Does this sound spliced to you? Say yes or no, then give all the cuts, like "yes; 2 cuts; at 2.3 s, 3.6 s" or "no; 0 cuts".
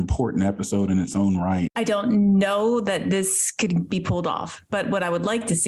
yes; 1 cut; at 1.7 s